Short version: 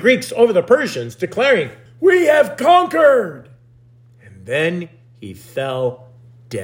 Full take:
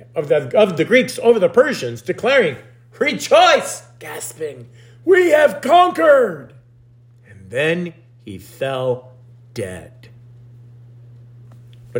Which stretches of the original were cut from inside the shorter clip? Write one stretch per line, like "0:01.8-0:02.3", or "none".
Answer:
0:02.7-0:04.9